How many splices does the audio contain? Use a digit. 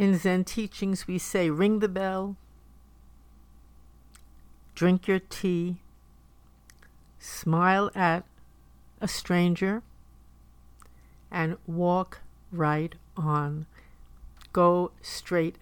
0